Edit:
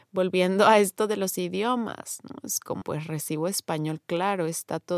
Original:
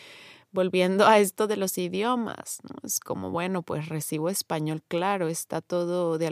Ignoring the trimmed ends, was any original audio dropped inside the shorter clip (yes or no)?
yes